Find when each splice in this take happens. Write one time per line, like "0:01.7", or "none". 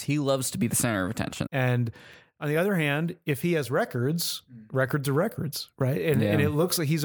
0:01.5